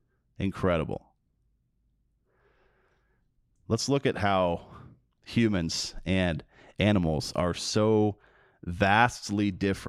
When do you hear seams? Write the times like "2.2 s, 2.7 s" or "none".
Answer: none